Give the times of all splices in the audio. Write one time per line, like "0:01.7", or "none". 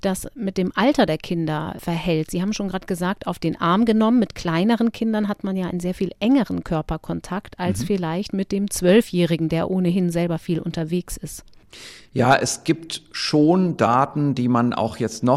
none

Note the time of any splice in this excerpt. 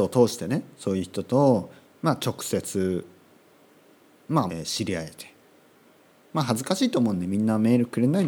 0:04.5

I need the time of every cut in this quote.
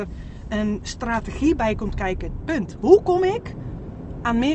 0:02.4

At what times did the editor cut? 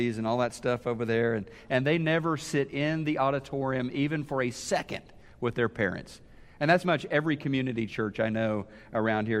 0:06.8

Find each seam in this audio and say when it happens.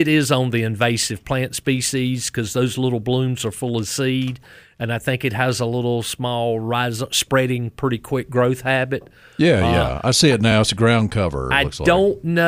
none

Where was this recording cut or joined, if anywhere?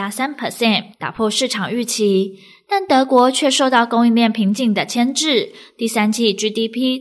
0:00.9

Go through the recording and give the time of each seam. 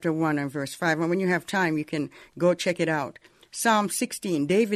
none

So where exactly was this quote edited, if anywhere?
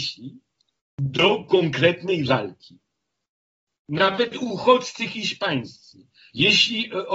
0:03.7

